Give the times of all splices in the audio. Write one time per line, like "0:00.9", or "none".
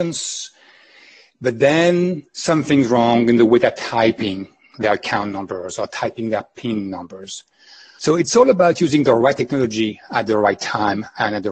0:08.0